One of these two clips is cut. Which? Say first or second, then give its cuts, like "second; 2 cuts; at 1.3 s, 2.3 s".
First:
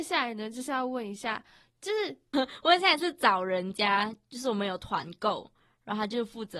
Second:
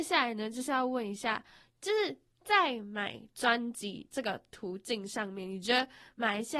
first; 1 cut; at 2.3 s